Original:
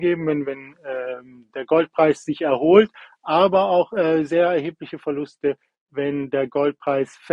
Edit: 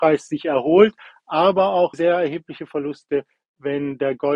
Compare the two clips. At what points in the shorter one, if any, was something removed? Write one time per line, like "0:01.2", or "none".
0:01.9